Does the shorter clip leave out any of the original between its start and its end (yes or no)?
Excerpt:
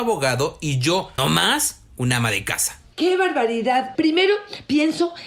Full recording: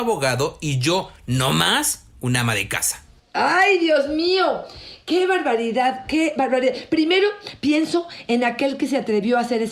yes